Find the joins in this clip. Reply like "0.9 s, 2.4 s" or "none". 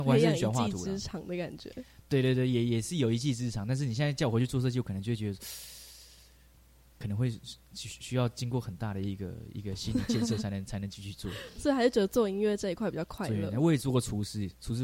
none